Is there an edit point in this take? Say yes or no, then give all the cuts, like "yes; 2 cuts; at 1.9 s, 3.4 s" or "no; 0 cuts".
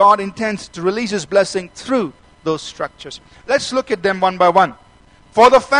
no; 0 cuts